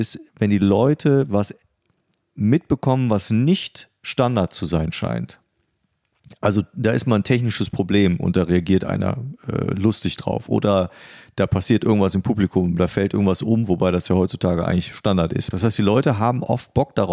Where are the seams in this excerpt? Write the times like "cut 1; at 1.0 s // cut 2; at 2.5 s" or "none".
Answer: cut 1; at 15.5 s

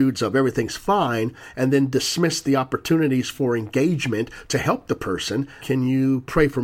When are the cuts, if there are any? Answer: cut 1; at 5.6 s

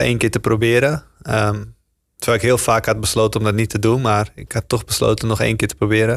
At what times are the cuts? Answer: none

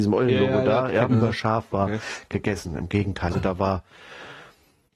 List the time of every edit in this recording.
cut 1; at 1.1 s // cut 2; at 3.3 s

